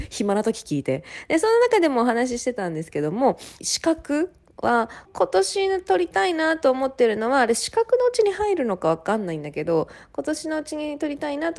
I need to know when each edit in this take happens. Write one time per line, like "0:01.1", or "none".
0:03.6
0:05.1